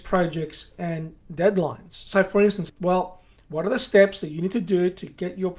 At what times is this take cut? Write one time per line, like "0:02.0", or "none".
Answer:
0:02.7